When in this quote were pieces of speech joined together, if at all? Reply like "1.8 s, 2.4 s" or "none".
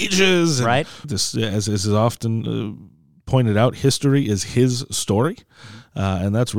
1.0 s